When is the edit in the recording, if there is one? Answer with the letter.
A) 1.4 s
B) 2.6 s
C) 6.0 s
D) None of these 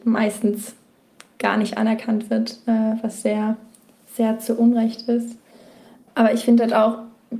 C